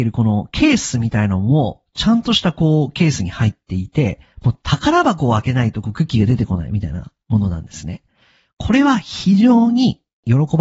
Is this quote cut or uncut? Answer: uncut